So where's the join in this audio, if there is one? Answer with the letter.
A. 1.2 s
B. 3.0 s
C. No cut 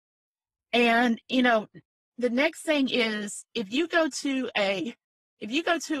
C